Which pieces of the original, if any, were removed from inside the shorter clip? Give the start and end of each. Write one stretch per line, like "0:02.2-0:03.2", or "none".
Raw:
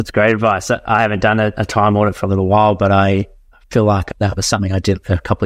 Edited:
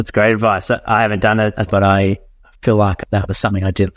0:01.7-0:02.7